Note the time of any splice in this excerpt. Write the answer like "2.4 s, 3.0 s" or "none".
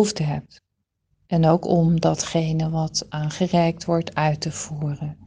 1.2 s